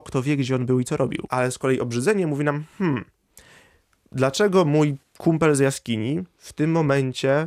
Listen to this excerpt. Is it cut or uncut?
cut